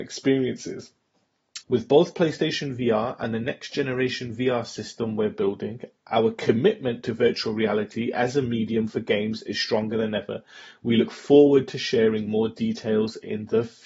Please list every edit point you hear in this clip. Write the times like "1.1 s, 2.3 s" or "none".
1.6 s